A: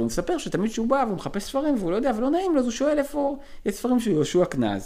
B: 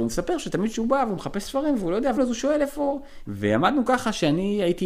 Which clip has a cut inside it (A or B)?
B